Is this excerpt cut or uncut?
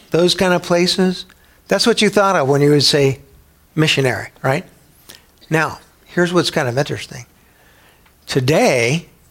uncut